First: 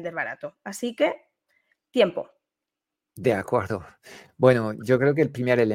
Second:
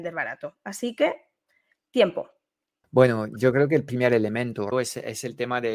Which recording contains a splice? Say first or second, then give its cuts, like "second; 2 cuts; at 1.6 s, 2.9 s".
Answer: second; 2 cuts; at 2.8 s, 4.7 s